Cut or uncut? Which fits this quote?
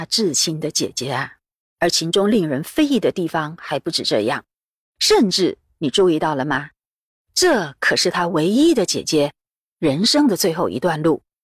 cut